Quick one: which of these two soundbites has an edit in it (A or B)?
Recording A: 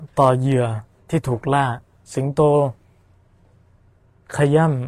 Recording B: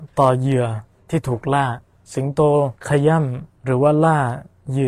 B